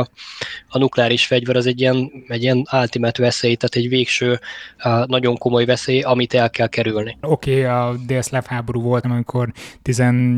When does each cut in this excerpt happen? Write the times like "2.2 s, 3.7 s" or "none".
7.2 s, 9.0 s